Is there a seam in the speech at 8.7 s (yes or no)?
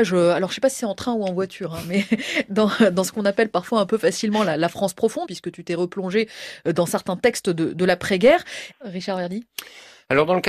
yes